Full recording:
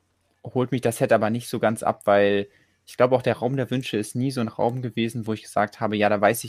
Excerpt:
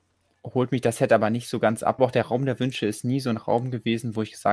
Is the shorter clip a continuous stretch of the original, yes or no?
no